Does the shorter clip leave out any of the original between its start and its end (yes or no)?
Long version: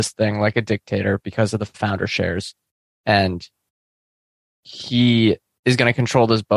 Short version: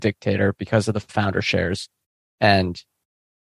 no